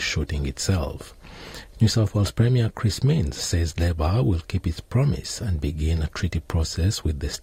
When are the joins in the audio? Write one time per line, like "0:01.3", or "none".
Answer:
0:01.7